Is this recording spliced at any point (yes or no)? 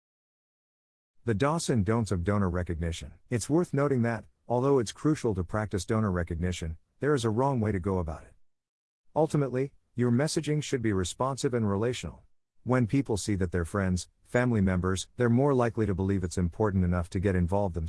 yes